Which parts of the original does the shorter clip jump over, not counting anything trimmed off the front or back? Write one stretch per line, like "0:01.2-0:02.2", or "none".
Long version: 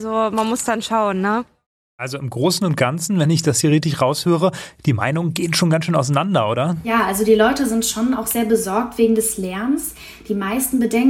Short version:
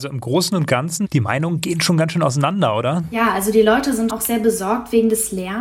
0:03.1-0:04.8
0:07.8-0:08.1

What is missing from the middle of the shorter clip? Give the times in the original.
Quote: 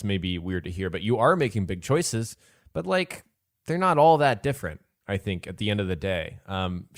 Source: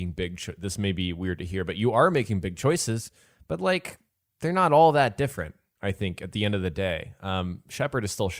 none

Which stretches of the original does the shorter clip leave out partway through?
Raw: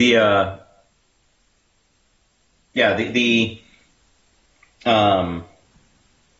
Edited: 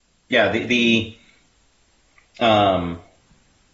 none

